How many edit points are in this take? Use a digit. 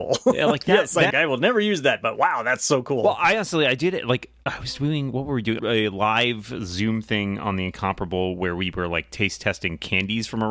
2